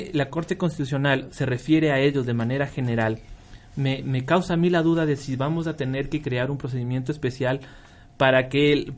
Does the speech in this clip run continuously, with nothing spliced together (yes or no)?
yes